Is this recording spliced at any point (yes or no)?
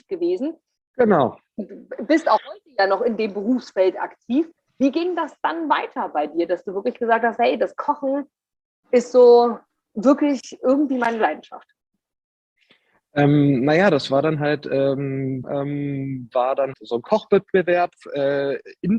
yes